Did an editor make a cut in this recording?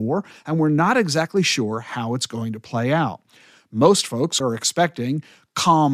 yes; 1 cut; at 4.4 s

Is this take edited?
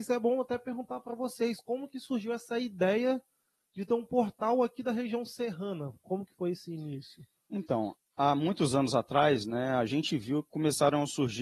yes; 2 cuts; at 6.0 s, 8.0 s

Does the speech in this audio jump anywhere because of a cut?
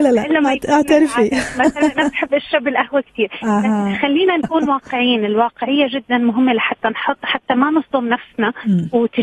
no; 0 cuts

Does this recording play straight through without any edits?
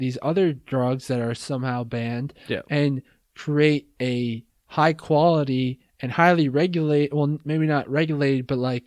yes; 0 cuts

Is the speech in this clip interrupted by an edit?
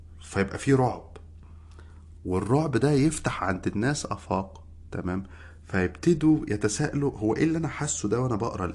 no; 0 cuts

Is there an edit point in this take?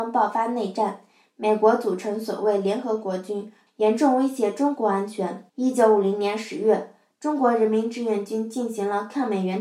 yes; 2 cuts; at 3.7 s, 5.5 s

